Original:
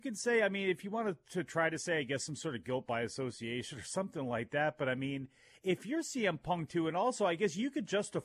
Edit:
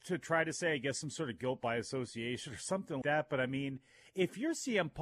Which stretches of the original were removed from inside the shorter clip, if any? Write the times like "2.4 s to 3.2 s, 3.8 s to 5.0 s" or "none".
4.3 s to 4.5 s